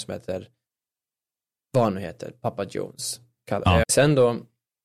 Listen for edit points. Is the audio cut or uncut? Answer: cut